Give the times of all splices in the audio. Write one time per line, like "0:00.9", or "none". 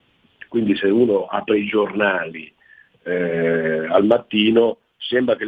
none